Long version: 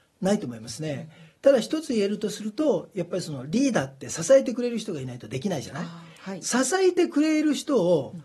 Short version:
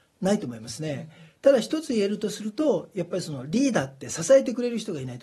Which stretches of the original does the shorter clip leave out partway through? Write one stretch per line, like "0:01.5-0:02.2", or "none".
none